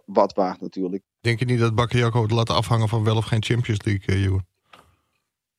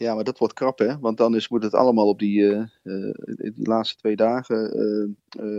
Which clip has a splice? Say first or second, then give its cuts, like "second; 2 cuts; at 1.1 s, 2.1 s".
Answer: first; 1 cut; at 1.0 s